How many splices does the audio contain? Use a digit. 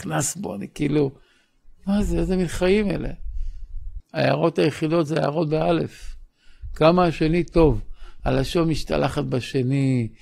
2